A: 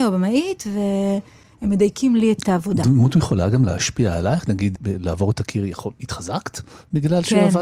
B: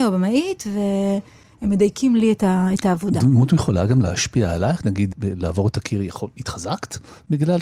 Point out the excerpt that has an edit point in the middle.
A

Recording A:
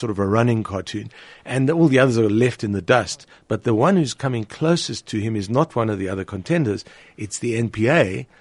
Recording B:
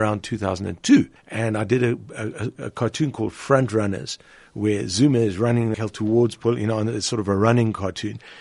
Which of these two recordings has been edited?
B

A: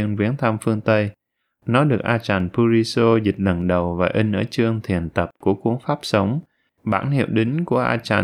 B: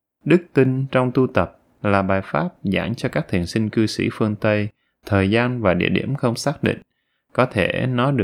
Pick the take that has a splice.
A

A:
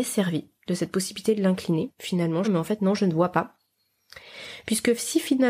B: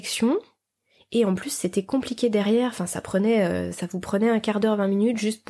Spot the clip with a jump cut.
A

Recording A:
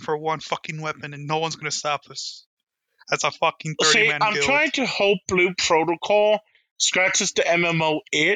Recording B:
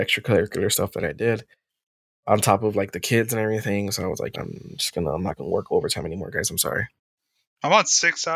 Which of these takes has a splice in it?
B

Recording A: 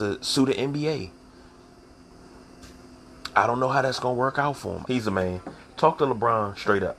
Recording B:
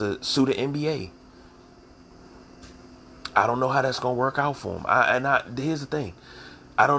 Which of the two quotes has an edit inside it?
A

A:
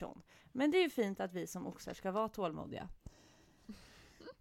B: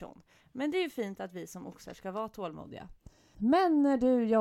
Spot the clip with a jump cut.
B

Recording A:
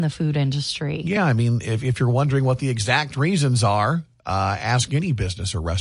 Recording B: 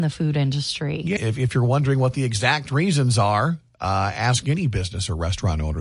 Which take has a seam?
B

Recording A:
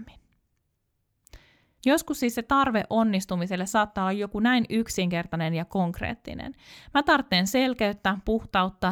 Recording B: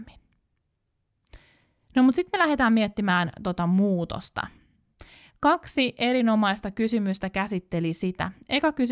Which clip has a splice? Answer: A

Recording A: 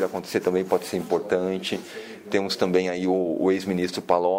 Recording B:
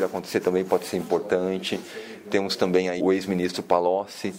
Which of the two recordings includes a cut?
B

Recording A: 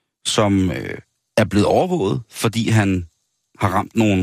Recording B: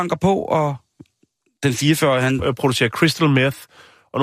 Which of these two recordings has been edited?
B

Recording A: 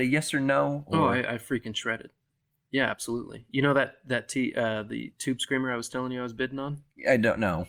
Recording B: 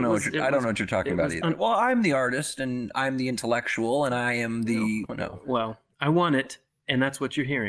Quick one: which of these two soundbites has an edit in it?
B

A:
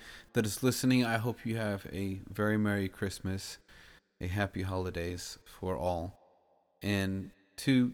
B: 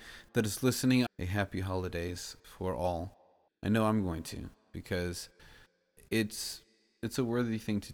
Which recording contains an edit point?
B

